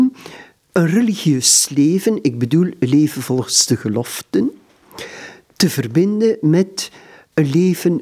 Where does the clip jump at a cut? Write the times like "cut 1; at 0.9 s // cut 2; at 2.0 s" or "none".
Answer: none